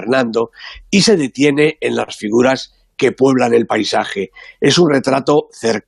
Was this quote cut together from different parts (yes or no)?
no